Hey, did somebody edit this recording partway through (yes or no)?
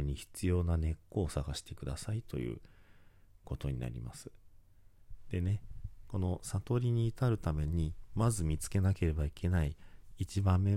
no